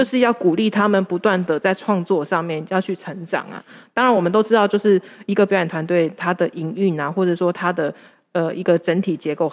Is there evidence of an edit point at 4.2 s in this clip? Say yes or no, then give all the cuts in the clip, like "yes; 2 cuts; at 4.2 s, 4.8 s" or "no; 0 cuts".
no; 0 cuts